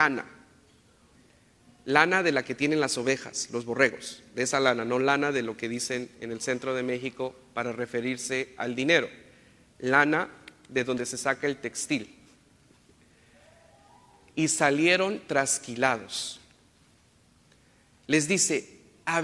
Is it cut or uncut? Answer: uncut